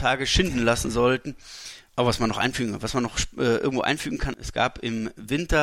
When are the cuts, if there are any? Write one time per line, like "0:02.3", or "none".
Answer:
0:01.9